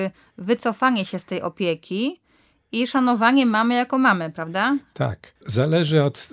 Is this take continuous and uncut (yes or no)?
no